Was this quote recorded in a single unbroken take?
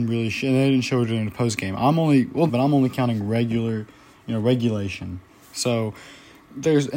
no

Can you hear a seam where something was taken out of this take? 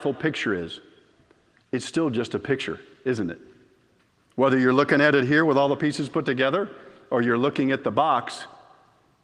yes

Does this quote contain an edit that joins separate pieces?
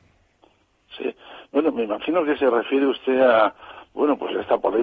no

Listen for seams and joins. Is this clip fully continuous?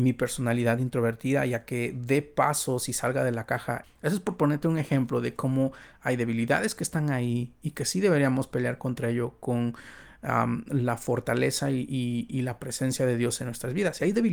no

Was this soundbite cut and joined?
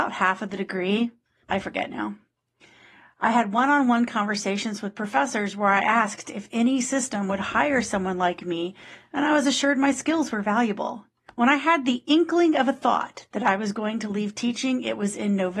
yes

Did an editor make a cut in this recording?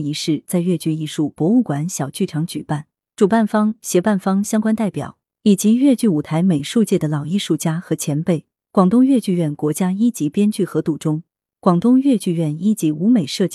no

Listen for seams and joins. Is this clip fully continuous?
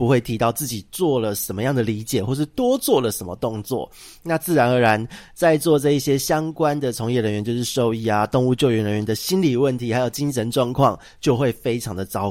yes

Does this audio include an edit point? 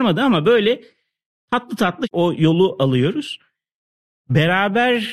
no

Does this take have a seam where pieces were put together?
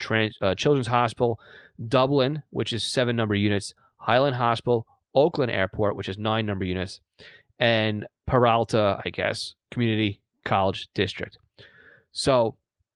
no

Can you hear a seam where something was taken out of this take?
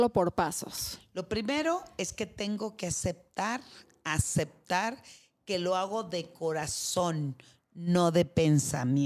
no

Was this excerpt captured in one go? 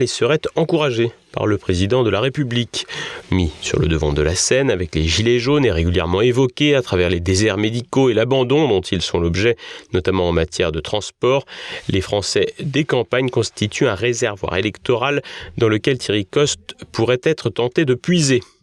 no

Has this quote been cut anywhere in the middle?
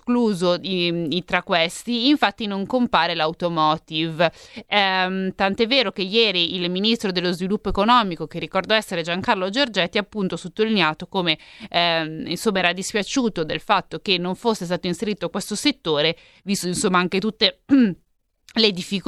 no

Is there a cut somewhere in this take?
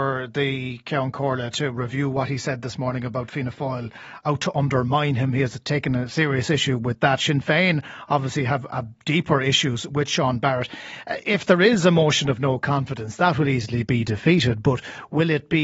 no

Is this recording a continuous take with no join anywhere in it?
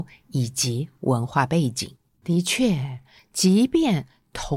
no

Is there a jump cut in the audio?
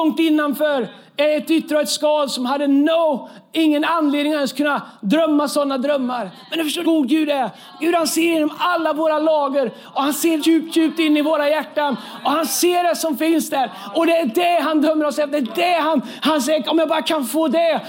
yes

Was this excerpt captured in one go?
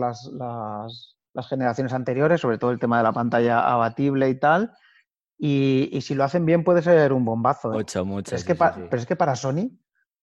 no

